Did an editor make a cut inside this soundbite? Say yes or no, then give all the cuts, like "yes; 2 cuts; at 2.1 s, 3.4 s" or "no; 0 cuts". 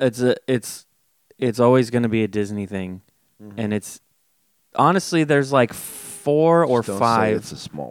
no; 0 cuts